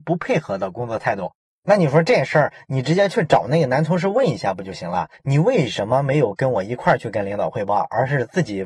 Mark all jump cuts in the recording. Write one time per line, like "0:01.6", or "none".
none